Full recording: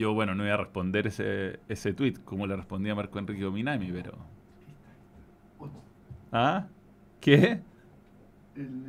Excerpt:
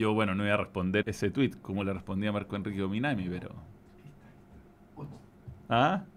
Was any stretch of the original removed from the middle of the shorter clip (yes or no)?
yes